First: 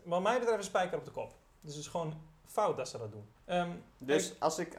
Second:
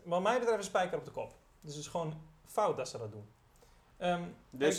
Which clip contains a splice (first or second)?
first